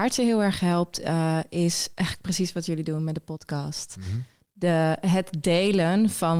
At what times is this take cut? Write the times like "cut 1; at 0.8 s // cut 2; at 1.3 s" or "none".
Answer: none